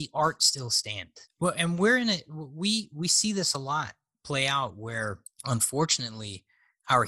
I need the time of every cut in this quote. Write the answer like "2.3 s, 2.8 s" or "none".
none